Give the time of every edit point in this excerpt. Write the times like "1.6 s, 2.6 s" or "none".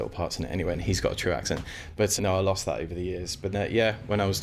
2.2 s, 3.5 s